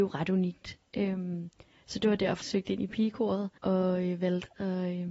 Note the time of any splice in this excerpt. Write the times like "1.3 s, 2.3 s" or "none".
2.4 s, 3.6 s